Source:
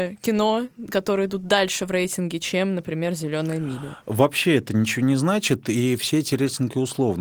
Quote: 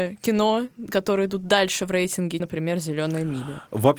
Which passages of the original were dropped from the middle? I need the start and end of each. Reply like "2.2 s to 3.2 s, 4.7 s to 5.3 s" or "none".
2.4 s to 2.7 s